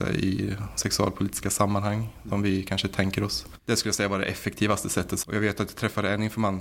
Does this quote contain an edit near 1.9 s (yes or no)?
no